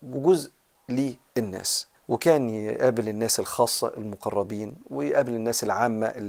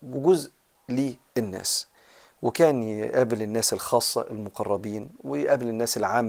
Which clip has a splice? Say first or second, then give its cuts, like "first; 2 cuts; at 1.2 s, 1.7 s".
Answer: first; 1 cut; at 2.0 s